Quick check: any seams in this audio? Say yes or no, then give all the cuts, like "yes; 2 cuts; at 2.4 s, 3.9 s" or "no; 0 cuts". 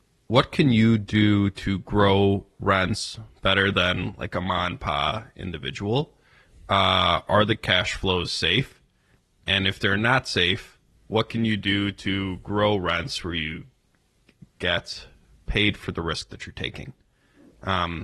no; 0 cuts